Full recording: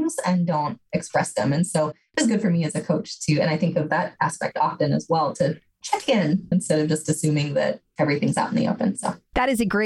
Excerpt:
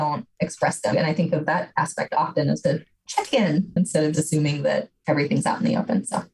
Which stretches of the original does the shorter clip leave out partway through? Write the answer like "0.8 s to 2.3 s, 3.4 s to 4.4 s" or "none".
1.4 s to 3.4 s, 5.1 s to 5.4 s, 6.9 s to 7.0 s